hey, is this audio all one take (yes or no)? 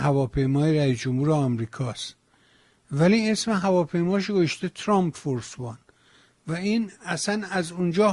yes